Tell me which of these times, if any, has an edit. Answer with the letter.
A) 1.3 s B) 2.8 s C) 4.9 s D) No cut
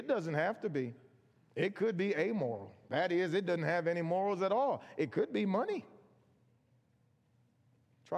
D